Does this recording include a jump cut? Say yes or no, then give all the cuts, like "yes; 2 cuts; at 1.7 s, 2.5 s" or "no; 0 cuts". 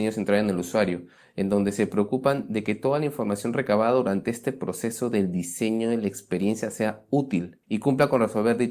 yes; 1 cut; at 7.6 s